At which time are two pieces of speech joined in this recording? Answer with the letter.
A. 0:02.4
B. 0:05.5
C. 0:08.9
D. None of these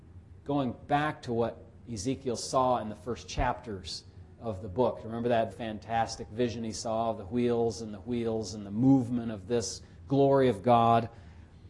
B